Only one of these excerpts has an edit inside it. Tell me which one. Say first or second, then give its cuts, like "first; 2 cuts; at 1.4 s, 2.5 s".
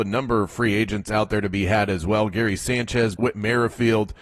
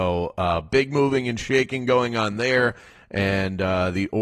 first; 1 cut; at 3.2 s